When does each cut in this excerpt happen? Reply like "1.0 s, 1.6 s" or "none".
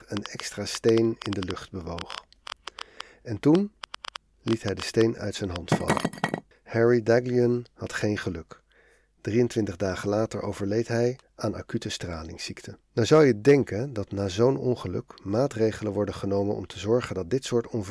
6.5 s, 11.2 s, 12.8 s